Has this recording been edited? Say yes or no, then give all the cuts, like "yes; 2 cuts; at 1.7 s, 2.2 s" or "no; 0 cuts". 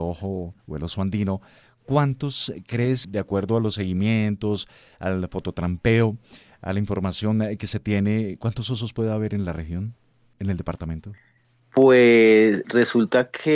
yes; 2 cuts; at 3.0 s, 12.6 s